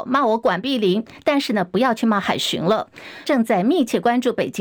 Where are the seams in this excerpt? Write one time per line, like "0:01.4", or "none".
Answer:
0:03.2